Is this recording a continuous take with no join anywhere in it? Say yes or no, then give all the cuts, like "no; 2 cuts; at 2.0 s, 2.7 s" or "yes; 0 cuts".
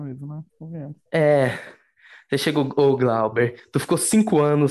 yes; 0 cuts